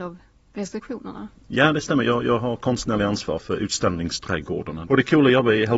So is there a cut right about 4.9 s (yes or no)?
yes